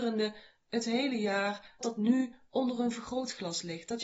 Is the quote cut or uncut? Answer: cut